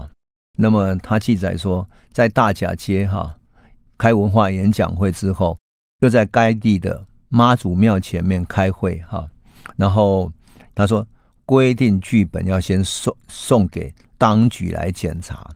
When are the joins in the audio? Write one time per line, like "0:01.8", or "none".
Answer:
0:04.0
0:10.7

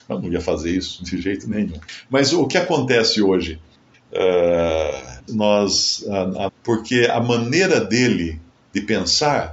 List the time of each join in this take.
0:03.9
0:05.3
0:06.5

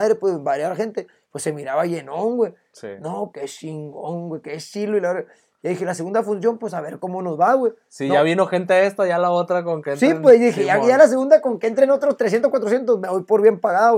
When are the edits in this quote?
0:03.3

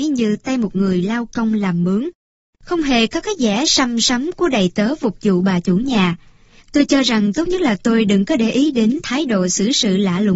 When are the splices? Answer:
0:02.5
0:06.6

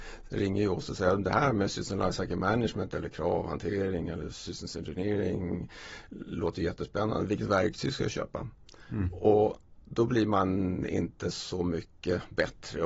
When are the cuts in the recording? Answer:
none

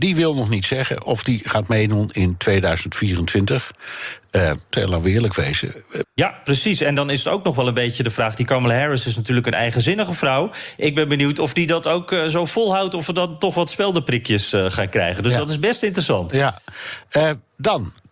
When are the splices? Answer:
0:04.7
0:06.0

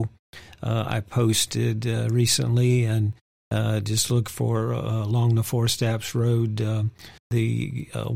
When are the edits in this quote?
0:07.2

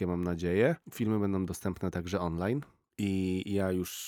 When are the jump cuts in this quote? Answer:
none

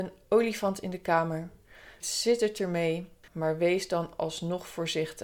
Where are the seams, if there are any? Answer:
0:02.0
0:03.3

